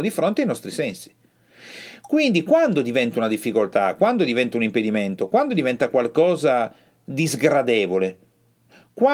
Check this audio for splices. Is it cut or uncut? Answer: uncut